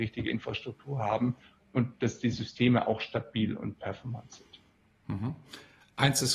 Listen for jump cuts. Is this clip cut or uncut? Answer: uncut